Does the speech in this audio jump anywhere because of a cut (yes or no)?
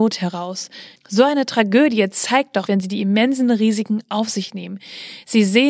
yes